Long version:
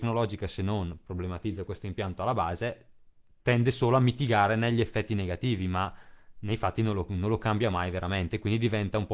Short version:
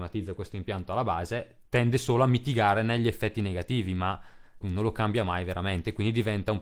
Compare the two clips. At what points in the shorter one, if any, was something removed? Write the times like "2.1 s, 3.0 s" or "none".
1.7 s, 4.6 s